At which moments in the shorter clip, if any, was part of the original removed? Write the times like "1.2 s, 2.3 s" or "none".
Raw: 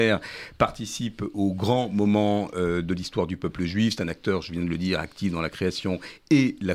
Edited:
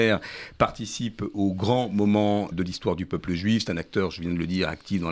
2.5 s